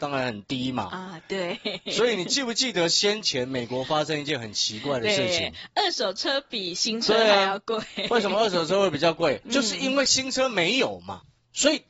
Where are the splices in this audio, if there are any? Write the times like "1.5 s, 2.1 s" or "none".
9.4 s